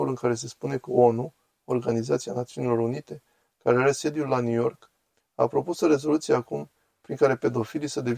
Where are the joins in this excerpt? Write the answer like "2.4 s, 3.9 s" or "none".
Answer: none